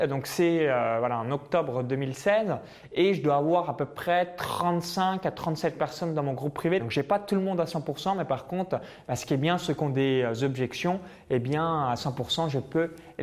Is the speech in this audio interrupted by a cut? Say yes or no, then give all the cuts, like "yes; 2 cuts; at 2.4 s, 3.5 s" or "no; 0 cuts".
yes; 1 cut; at 6.8 s